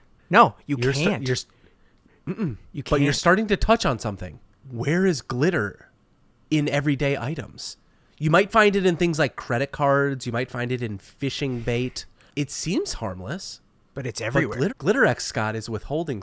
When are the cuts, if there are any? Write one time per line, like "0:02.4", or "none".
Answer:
0:14.7

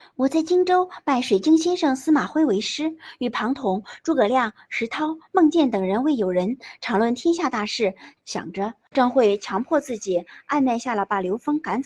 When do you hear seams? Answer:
0:08.2

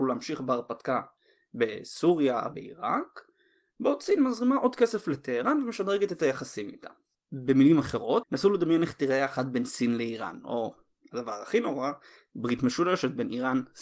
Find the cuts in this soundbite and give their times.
0:02.5
0:08.2

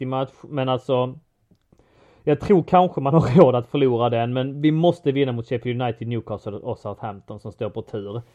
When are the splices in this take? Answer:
none

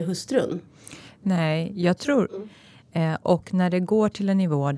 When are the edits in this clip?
0:02.3

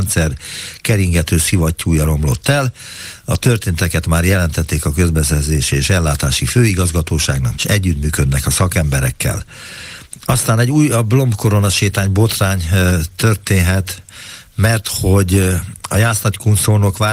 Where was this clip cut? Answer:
0:07.5

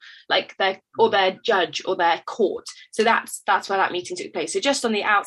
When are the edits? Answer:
none

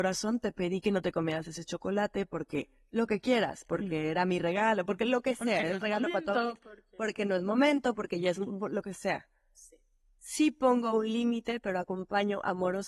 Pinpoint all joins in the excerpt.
none

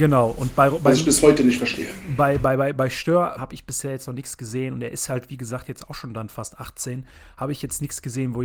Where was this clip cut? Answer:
0:03.4

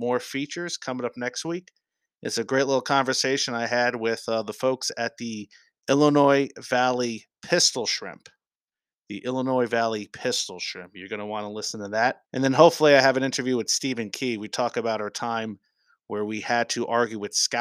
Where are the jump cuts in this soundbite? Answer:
0:12.2

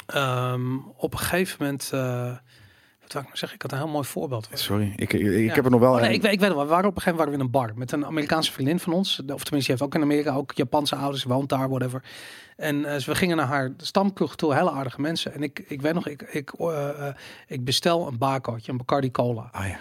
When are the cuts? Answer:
none

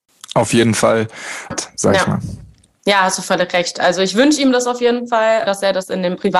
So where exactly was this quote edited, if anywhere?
0:01.5
0:05.5

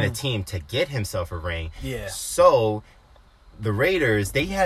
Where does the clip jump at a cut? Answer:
none

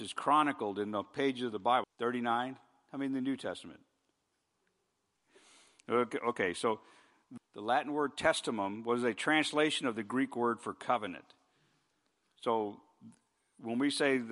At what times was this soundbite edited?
0:01.8
0:05.1
0:07.4

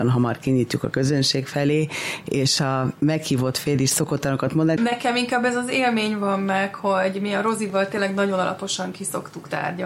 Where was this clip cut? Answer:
0:04.8

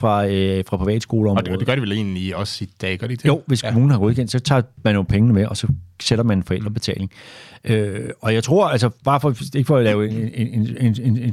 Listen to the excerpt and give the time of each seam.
none

